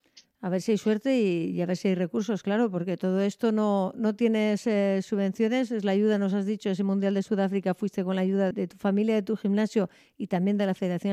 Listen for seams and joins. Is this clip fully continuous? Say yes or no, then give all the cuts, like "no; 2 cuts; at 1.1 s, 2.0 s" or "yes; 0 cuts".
no; 1 cut; at 8.5 s